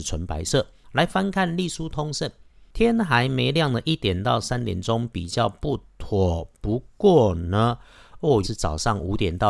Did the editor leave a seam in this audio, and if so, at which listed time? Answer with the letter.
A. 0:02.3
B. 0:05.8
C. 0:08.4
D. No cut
C